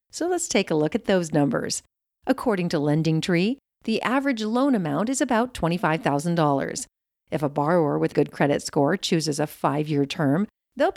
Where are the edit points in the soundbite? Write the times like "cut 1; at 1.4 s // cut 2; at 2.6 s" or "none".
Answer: cut 1; at 8.1 s